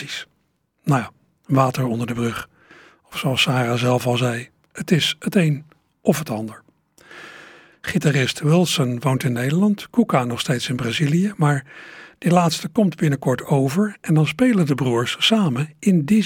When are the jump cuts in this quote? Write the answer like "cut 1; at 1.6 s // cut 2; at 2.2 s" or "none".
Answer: cut 1; at 7.7 s